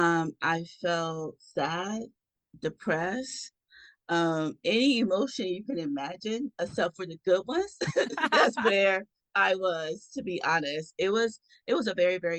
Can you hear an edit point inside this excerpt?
no; 0 cuts

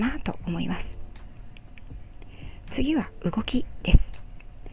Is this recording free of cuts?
yes; 0 cuts

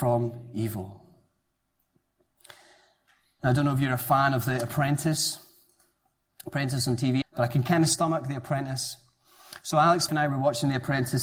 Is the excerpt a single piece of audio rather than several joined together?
no; 2 cuts; at 7.2 s, 10.1 s

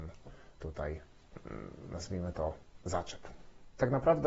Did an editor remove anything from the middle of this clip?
no; 0 cuts

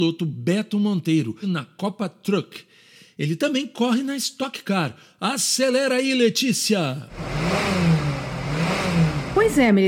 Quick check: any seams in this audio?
no; 0 cuts

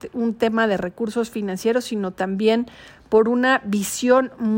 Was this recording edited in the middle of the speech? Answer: no; 0 cuts

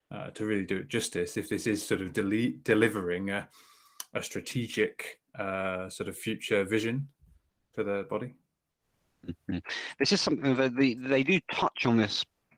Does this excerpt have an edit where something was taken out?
no; 0 cuts

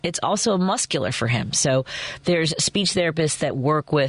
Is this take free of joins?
yes; 0 cuts

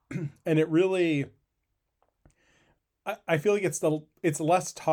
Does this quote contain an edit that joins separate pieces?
no; 0 cuts

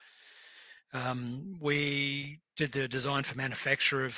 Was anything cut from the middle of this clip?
no; 0 cuts

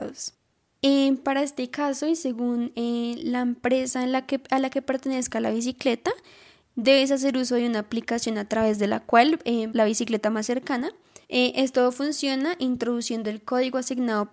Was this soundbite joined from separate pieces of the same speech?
yes; 2 cuts; at 9.7 s, 11.2 s

